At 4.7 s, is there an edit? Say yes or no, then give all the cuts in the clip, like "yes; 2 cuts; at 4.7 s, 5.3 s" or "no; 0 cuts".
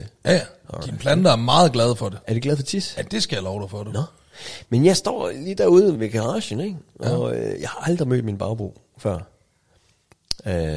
no; 1 cut; at 6.0 s